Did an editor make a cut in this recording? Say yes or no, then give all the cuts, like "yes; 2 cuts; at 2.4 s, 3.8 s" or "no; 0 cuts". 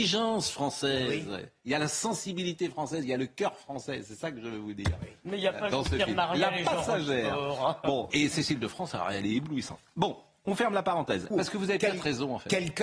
yes; 2 cuts; at 8.1 s, 11.3 s